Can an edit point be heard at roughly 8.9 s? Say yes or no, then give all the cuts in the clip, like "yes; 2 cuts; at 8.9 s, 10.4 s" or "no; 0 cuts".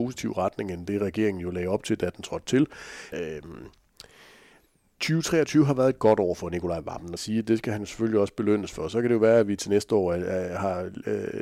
no; 2 cuts; at 3.1 s, 7.2 s